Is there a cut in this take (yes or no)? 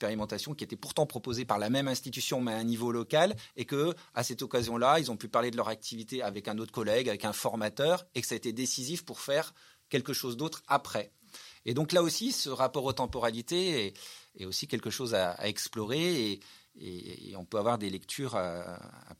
no